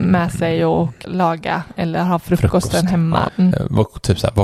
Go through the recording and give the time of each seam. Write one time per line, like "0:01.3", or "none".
0:01.0
0:03.3